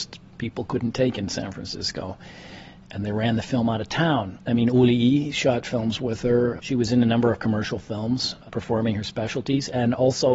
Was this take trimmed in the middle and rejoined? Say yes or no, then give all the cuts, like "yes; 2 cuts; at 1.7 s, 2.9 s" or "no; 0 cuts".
yes; 2 cuts; at 4.4 s, 6.6 s